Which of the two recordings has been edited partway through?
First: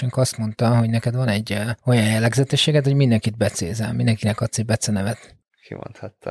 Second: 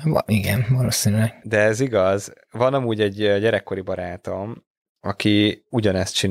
first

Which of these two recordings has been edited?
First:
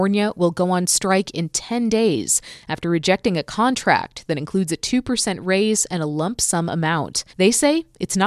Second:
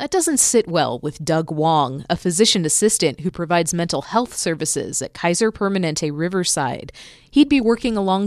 first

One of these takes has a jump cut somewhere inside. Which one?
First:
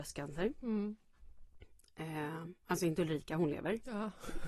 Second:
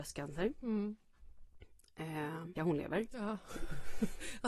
second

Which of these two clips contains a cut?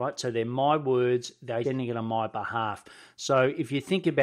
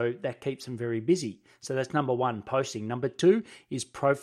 first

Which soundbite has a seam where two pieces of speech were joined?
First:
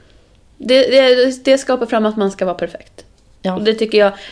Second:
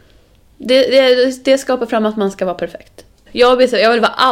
second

